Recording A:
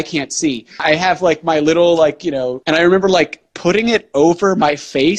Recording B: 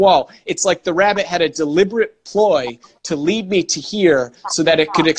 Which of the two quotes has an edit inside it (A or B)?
A